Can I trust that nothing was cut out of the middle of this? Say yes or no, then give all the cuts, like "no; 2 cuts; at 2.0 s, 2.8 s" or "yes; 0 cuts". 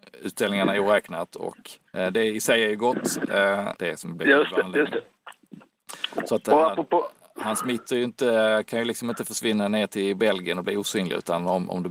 no; 2 cuts; at 1.9 s, 3.8 s